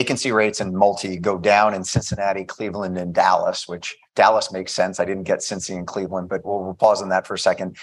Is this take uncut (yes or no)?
no